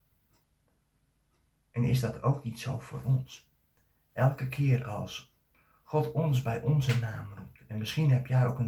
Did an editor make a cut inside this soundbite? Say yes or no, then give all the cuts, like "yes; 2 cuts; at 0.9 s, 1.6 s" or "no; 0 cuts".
no; 0 cuts